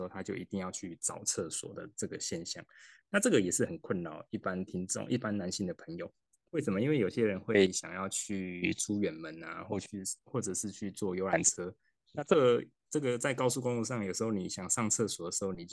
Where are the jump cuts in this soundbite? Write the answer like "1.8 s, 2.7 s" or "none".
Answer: none

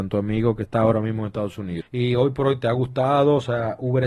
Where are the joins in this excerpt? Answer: 1.8 s

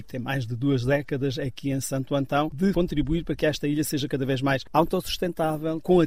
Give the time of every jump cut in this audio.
none

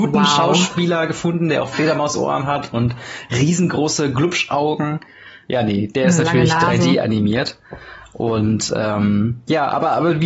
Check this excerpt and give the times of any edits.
none

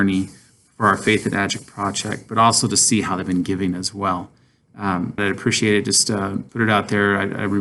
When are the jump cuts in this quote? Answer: 5.2 s, 6.5 s

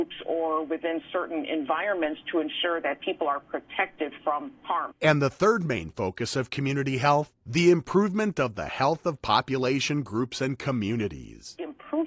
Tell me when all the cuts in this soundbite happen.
4.9 s, 7.4 s

